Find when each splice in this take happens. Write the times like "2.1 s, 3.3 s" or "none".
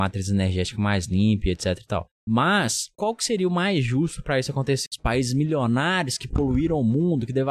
4.9 s